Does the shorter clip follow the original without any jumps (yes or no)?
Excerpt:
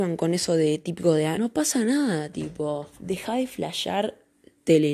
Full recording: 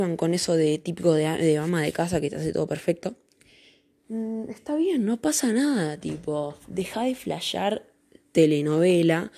no